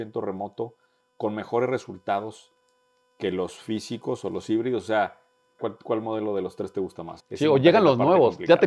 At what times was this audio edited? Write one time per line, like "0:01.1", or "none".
0:05.6
0:07.2